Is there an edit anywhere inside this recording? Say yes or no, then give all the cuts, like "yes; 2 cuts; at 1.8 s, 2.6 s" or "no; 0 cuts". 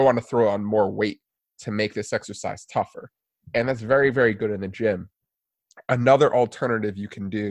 no; 0 cuts